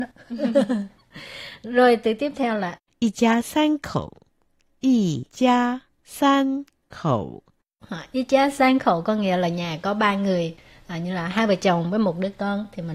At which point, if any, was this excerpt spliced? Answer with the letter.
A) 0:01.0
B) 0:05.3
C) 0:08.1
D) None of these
B